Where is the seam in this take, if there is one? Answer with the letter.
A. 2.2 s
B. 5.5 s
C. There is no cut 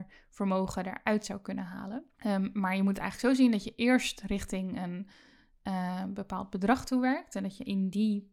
A